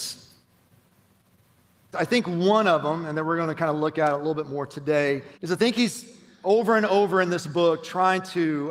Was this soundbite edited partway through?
yes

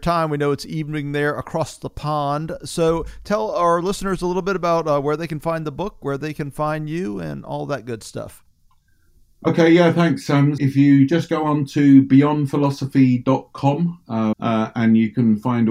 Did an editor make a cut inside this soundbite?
yes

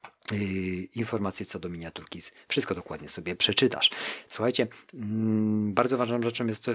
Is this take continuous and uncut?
no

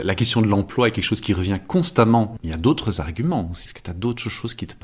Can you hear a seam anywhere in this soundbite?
no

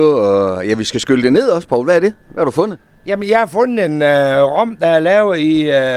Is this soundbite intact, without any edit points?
yes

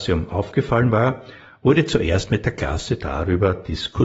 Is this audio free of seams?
yes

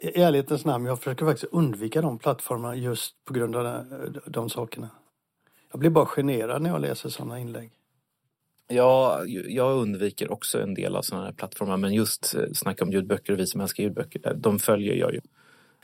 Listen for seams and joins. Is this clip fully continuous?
yes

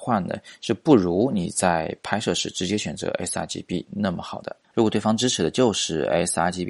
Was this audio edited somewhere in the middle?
yes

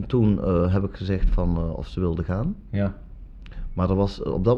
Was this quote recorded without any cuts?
yes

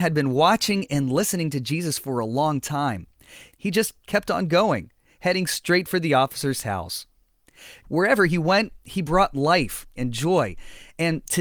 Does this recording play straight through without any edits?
no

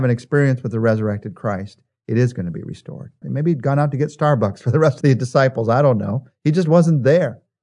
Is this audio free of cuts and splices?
no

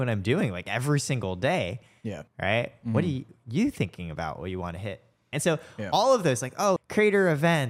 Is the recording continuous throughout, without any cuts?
no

